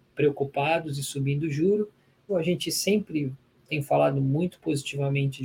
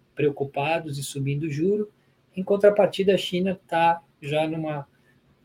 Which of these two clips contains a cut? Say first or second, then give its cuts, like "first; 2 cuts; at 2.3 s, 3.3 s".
first; 1 cut; at 2.3 s